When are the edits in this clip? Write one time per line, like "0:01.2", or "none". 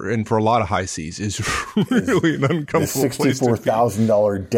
none